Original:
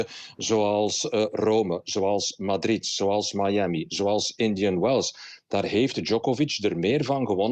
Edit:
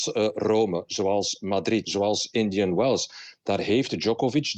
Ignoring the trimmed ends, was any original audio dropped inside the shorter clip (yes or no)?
yes